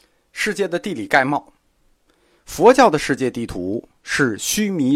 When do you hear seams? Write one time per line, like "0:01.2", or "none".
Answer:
none